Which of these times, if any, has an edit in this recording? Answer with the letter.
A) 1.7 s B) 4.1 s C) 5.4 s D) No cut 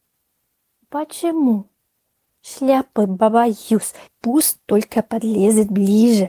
B